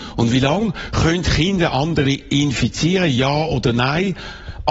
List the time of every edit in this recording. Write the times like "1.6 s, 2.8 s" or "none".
none

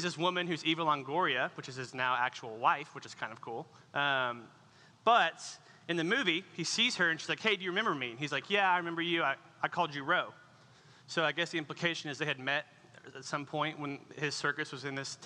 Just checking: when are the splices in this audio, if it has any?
none

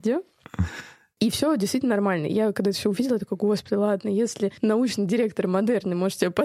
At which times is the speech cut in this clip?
4.6 s

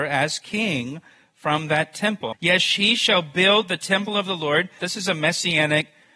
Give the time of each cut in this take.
2.3 s, 4.8 s

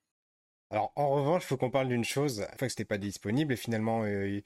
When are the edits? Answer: 2.6 s

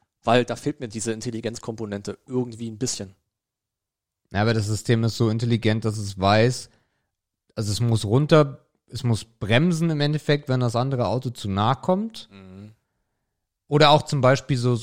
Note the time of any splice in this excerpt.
none

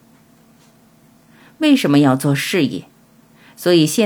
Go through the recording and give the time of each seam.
none

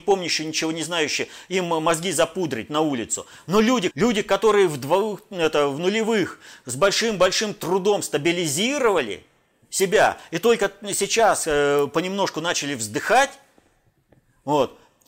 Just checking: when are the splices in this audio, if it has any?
3.9 s

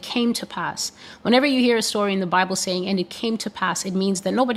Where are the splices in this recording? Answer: none

